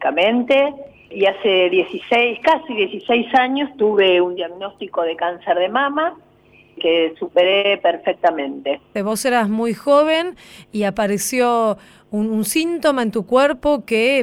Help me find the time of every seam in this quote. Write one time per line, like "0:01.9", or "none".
0:09.0